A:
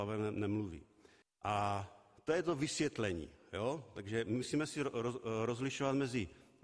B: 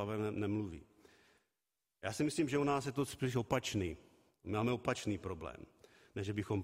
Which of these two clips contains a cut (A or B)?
A